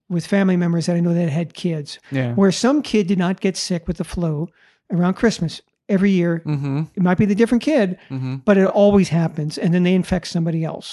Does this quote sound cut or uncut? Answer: uncut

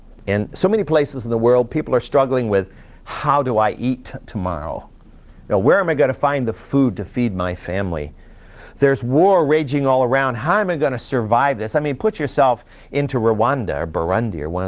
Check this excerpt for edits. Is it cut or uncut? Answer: uncut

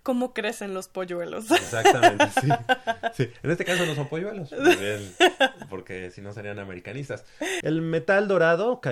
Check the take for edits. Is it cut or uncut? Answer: cut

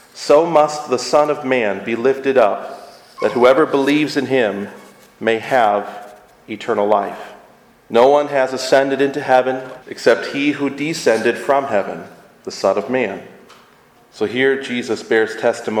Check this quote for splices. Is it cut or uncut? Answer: cut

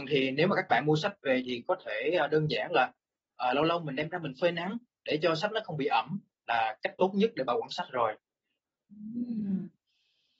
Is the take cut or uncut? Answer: uncut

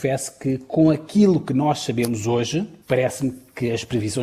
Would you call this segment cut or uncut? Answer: cut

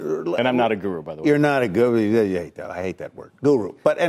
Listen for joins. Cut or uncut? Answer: uncut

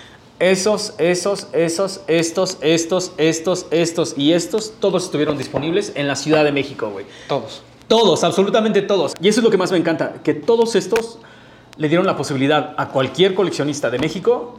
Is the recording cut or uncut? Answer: uncut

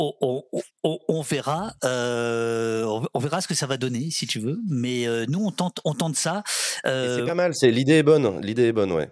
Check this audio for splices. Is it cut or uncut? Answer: uncut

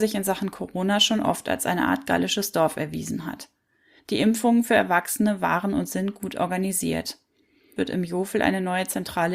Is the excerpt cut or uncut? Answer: cut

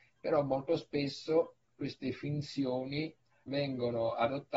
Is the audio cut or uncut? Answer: cut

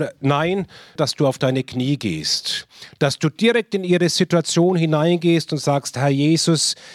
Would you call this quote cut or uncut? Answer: cut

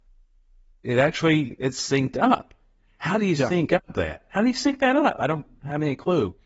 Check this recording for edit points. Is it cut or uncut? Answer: uncut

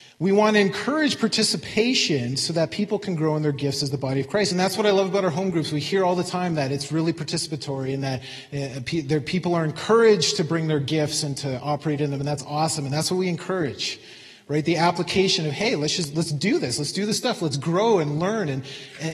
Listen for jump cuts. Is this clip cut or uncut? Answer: cut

